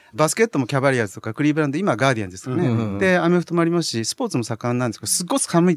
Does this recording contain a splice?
no; 0 cuts

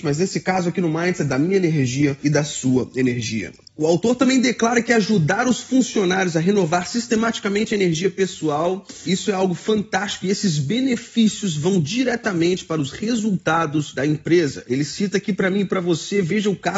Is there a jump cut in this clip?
no; 0 cuts

